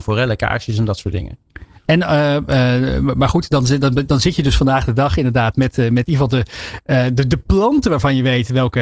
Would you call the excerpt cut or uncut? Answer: uncut